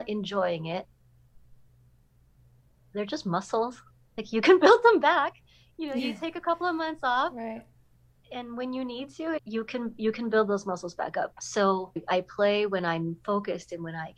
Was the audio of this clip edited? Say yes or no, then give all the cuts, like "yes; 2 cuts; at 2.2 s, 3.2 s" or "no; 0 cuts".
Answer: yes; 2 cuts; at 9.4 s, 11.3 s